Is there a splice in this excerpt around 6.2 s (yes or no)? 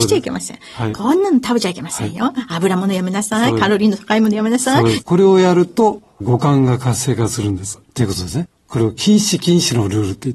yes